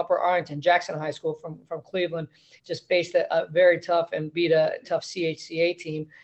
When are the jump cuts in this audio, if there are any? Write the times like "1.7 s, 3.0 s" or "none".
2.6 s, 4.8 s